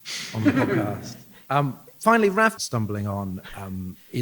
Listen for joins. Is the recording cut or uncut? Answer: cut